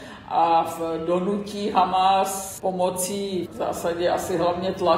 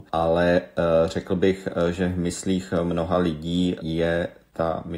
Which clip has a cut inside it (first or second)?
first